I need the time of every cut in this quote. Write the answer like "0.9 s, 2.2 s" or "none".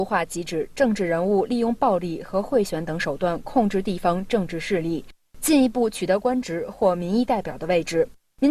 none